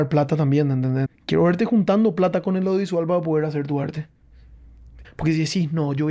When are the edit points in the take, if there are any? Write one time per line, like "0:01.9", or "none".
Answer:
0:01.1
0:05.0